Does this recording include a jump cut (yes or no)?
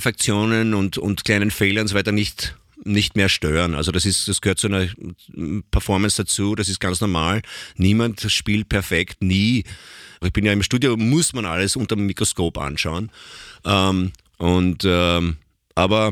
yes